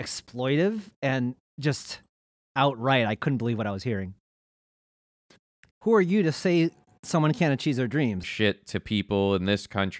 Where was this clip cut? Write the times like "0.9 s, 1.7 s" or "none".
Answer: 5.7 s, 8.2 s